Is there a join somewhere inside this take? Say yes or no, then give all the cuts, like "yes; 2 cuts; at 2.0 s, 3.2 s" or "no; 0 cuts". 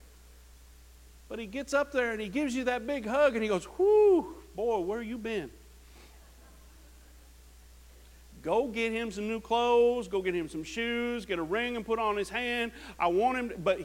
no; 0 cuts